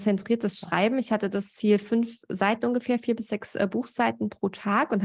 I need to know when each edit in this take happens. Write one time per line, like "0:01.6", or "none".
none

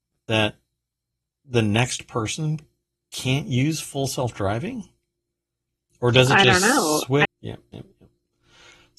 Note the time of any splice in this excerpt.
0:07.3

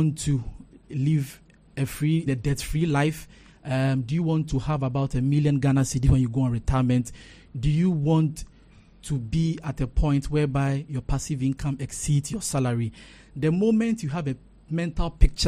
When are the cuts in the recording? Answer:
0:02.3

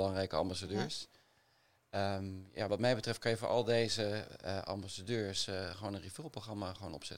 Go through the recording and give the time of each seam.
none

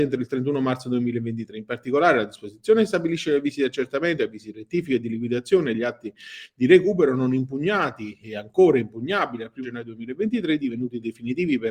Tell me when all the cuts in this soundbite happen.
0:09.6

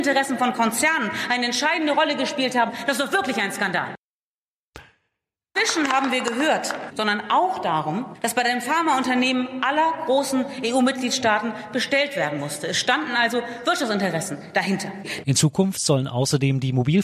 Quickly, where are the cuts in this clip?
0:05.6
0:06.9
0:15.2

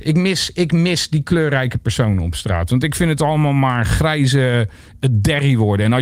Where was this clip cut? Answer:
none

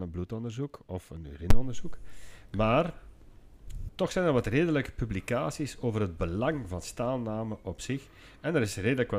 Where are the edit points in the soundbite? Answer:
0:03.9

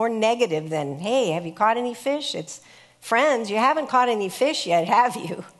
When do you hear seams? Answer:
none

